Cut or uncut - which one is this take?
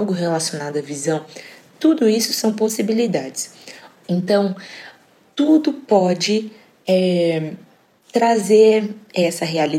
cut